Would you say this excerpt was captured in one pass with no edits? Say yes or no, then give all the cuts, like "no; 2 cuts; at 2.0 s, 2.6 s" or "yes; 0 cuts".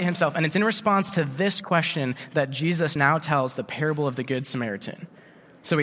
yes; 0 cuts